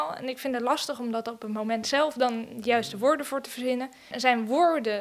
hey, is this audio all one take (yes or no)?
no